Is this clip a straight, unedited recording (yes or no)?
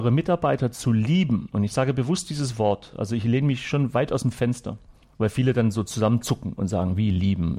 yes